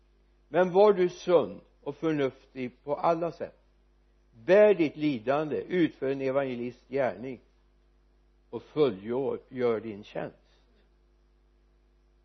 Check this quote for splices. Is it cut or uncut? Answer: uncut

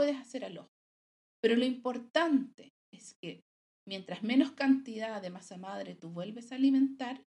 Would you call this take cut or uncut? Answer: uncut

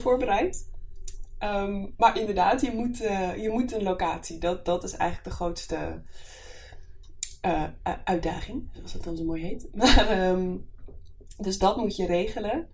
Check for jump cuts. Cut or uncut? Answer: uncut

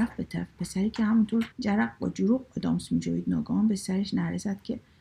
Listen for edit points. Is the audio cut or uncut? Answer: cut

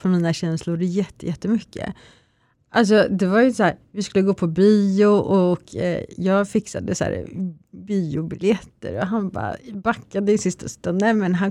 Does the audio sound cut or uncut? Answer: uncut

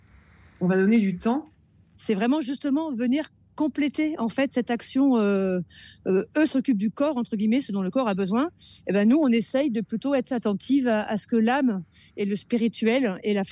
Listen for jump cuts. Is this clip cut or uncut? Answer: cut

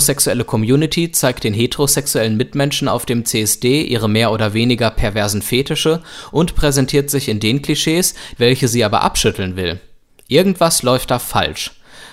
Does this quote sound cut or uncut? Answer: cut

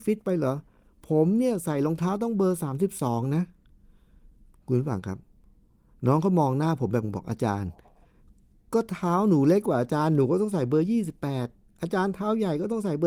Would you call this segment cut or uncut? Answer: cut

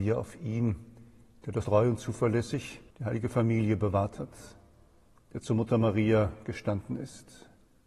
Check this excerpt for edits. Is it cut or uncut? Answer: cut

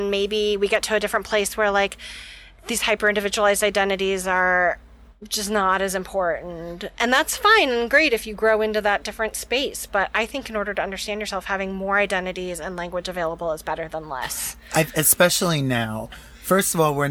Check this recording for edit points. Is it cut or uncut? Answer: uncut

